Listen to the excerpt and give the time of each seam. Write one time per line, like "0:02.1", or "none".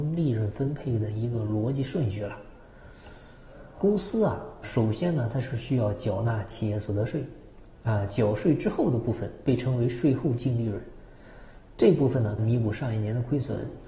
0:04.6
0:12.4